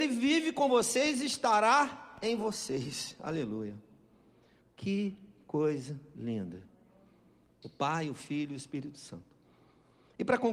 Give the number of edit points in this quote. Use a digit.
2